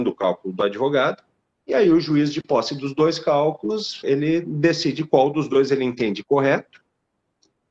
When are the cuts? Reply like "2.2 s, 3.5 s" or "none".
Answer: 4.0 s